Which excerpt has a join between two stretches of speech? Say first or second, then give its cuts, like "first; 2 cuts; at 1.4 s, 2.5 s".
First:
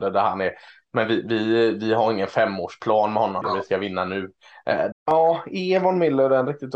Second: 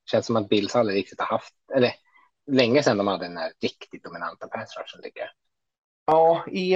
first; 2 cuts; at 3.4 s, 4.9 s